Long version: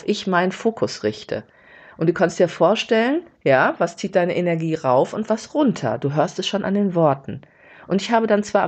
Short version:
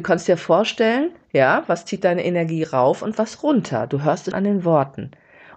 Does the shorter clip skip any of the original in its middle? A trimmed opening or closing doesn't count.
yes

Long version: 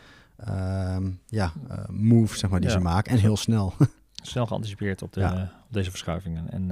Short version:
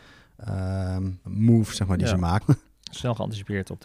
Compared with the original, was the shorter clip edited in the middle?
yes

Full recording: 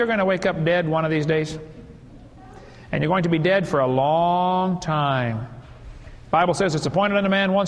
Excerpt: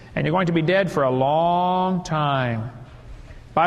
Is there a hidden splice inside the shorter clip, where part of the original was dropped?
no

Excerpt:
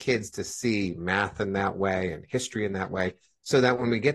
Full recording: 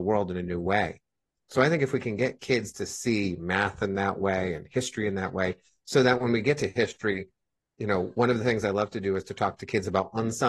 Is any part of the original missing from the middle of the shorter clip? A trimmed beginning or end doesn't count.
no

